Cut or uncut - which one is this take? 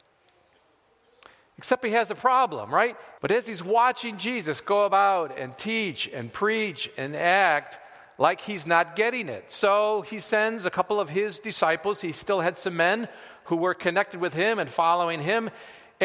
cut